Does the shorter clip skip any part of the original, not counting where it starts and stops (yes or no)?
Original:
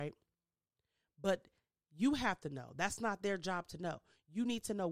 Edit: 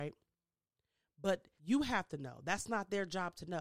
yes